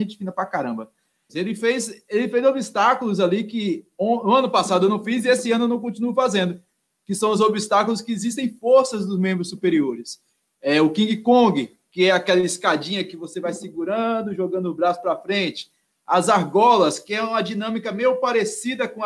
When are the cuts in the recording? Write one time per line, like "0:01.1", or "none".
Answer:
0:01.3